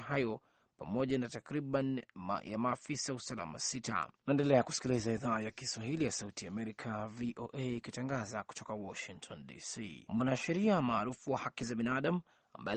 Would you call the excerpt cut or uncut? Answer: uncut